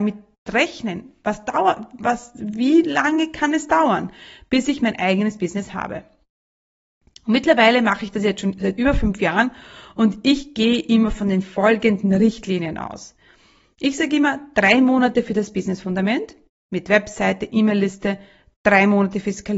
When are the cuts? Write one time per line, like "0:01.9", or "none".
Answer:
0:16.5
0:18.6